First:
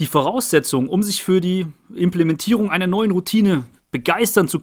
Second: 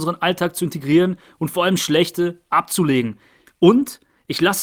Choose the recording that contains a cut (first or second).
second